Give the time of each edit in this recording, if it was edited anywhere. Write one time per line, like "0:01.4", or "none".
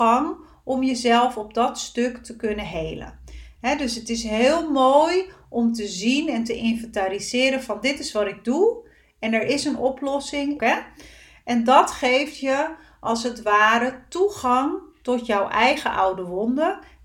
0:10.6